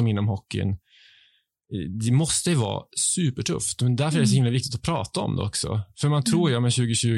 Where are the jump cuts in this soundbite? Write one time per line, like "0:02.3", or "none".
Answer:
none